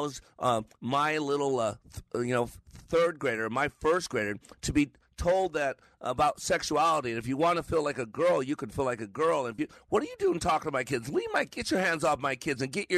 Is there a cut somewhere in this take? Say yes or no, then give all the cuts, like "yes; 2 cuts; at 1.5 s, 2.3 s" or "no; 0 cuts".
no; 0 cuts